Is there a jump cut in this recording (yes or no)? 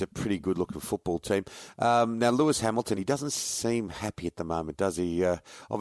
no